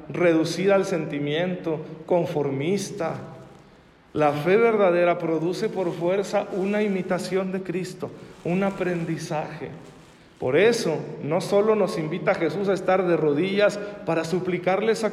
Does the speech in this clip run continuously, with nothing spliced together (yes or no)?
yes